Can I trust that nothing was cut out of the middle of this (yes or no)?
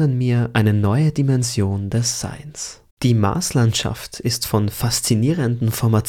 no